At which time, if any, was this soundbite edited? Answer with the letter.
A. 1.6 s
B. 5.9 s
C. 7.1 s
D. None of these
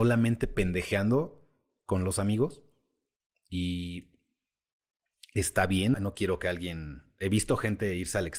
B